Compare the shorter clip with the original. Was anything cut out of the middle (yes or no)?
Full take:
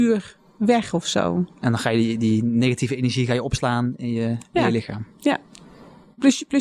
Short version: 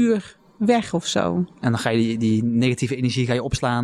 no